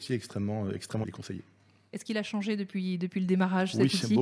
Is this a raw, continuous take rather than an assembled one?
no; 1 cut; at 1.0 s

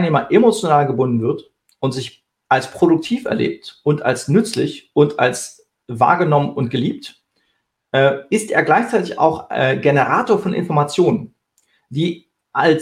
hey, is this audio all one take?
yes; 0 cuts

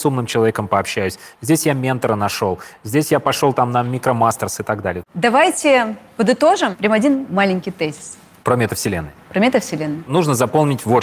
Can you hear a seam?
yes; 1 cut; at 5.0 s

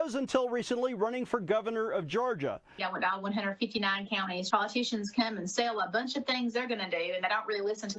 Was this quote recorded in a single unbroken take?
no; 2 cuts; at 2.8 s, 4.5 s

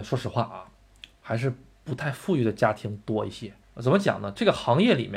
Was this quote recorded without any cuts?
no; 1 cut; at 3.6 s

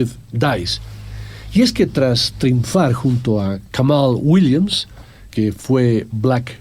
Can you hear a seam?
yes; 1 cut; at 5.3 s

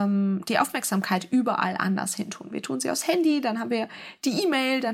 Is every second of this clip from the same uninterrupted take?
yes; 0 cuts

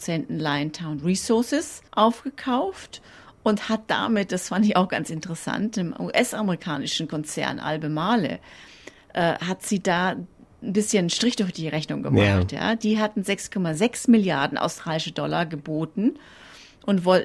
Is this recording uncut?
no; 1 cut; at 1.9 s

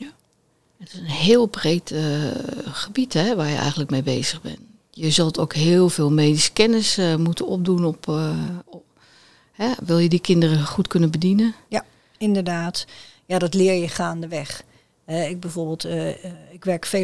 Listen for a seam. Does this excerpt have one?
no; 0 cuts

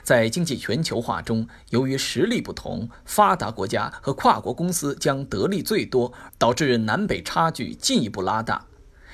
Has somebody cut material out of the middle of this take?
yes; 1 cut; at 6.3 s

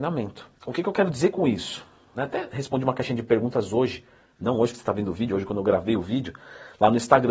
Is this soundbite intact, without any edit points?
no; 1 cut; at 2.1 s

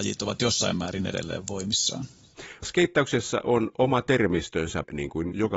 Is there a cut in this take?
no; 0 cuts

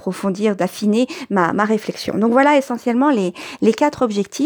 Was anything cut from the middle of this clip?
no; 0 cuts

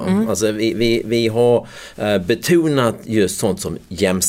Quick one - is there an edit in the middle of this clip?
no; 0 cuts

